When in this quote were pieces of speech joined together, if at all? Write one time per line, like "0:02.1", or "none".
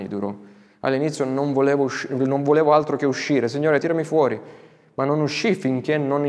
0:03.8